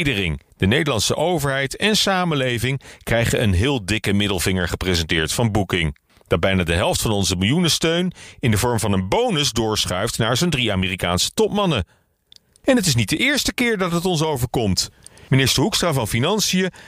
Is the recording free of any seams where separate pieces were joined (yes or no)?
yes